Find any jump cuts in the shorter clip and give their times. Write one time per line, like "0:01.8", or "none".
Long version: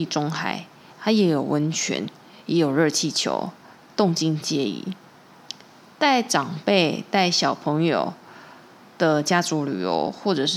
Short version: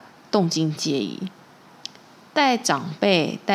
none